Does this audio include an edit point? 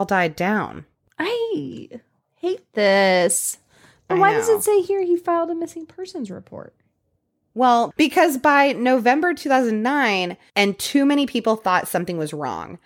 yes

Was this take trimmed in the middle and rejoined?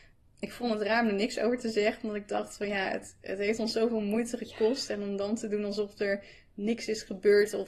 no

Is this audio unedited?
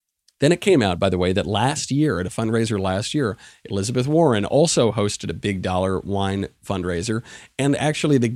yes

